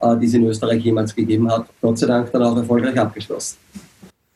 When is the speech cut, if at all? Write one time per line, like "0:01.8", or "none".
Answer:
0:01.7